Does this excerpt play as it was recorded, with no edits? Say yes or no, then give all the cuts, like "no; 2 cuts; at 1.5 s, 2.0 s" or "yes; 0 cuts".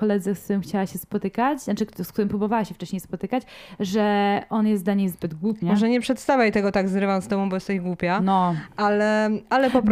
no; 1 cut; at 5.6 s